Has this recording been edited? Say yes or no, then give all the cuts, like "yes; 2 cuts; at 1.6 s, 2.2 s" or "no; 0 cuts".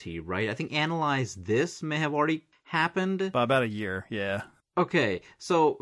no; 0 cuts